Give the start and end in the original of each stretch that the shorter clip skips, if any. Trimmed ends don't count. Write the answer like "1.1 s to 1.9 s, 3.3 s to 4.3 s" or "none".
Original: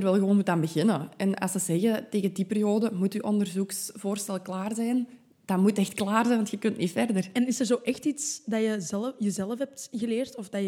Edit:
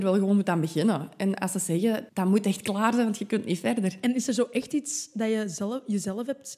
2.1 s to 5.4 s